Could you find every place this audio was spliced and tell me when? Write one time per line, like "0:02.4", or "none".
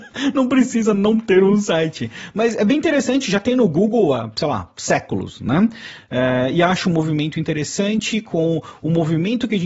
none

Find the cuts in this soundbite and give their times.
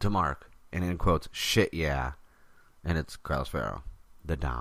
none

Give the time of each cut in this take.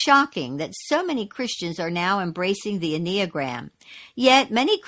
none

